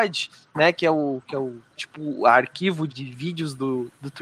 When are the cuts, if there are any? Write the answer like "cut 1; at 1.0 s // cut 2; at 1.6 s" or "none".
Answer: cut 1; at 2.9 s